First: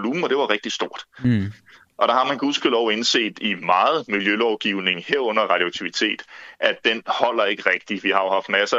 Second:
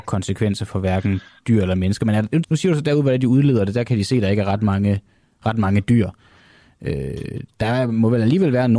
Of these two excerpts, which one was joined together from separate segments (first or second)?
second